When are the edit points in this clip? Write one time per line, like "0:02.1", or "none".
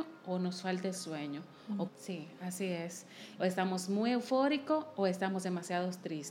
0:01.9
0:03.4